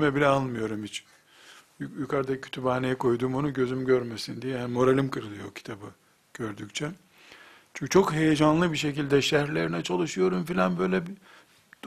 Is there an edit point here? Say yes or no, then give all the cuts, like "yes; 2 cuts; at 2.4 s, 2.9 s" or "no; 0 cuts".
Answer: no; 0 cuts